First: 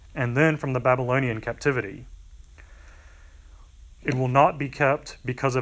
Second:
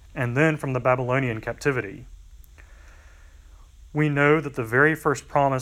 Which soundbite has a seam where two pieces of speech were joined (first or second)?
first